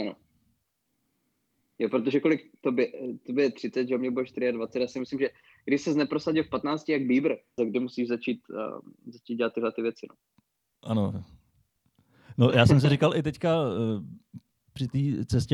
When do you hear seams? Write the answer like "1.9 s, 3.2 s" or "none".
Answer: 7.6 s